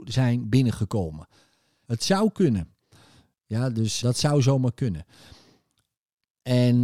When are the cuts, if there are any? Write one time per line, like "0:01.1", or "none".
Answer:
0:01.8
0:04.0